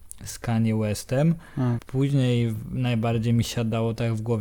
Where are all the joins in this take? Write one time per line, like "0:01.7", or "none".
0:01.8